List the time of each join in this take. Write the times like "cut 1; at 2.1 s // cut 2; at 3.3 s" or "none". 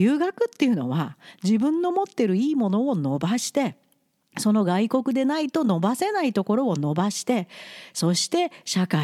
none

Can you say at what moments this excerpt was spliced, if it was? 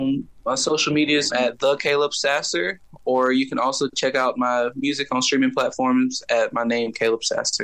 cut 1; at 1.3 s

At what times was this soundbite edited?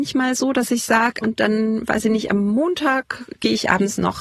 cut 1; at 1.2 s

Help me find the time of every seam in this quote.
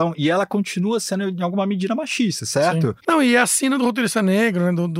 cut 1; at 3.0 s

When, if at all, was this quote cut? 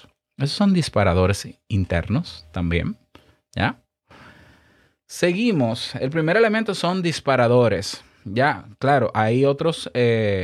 none

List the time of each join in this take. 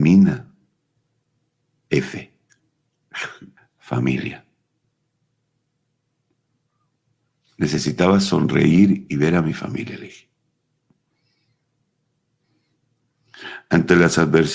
cut 1; at 3.6 s

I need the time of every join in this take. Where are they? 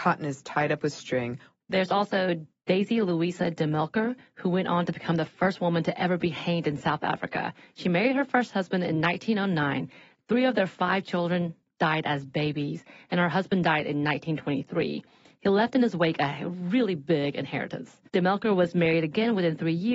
cut 1; at 1.6 s // cut 2; at 18.1 s

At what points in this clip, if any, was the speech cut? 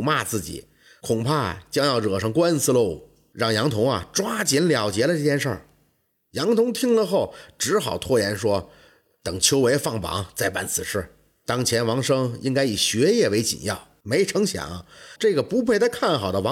cut 1; at 14.0 s // cut 2; at 15.2 s

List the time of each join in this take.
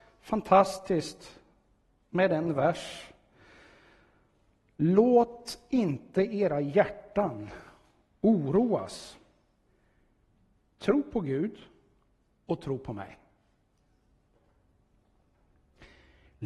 none

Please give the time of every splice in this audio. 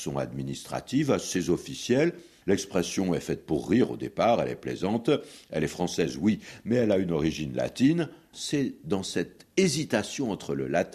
cut 1; at 2.4 s // cut 2; at 8.3 s

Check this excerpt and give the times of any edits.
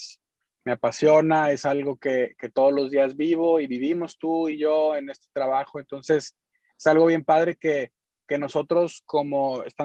none

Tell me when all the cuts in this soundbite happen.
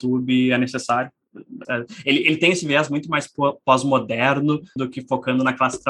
cut 1; at 1.6 s // cut 2; at 4.8 s

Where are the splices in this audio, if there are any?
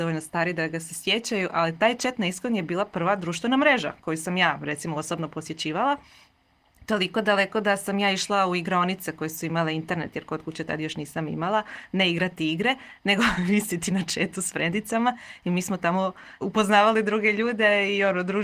cut 1; at 16.4 s

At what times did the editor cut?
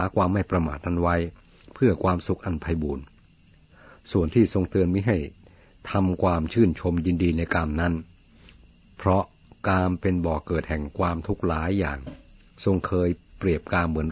none

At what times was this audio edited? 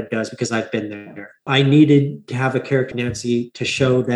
cut 1; at 1.5 s // cut 2; at 2.9 s

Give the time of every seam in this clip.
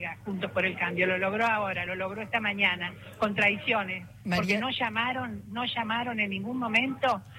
none

